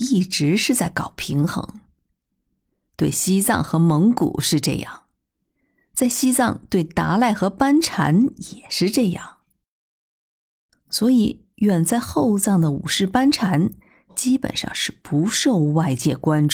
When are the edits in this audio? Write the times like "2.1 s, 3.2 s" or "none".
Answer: 10.7 s